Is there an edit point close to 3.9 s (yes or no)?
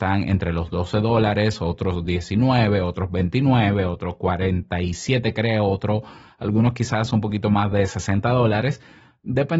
no